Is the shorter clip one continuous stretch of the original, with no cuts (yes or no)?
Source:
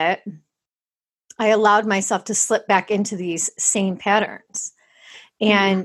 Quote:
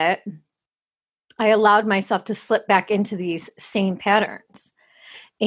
yes